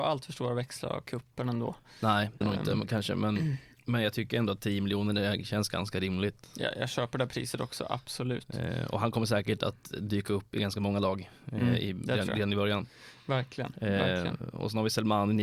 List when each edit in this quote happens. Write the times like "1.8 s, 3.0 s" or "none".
2.4 s